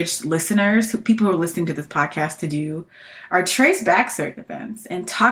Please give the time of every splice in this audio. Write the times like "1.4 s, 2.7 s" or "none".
none